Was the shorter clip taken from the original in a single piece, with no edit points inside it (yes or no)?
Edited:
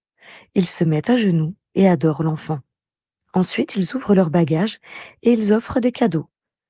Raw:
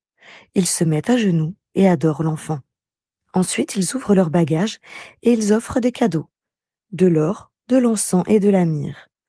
yes